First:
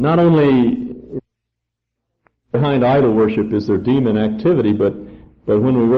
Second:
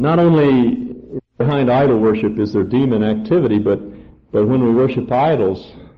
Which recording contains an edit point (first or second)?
second